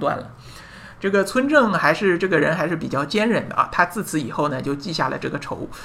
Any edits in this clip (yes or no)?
no